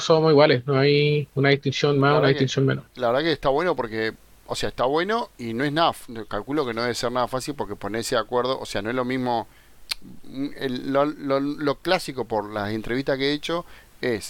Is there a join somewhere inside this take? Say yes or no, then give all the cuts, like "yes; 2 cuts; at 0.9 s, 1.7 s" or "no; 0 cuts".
no; 0 cuts